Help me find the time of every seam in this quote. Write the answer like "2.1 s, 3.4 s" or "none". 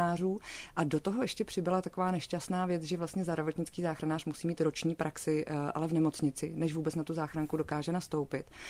none